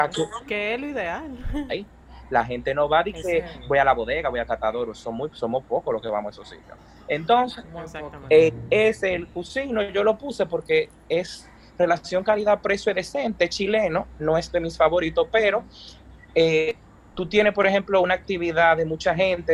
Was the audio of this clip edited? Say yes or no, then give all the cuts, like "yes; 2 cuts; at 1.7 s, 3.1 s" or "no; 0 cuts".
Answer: yes; 1 cut; at 1.7 s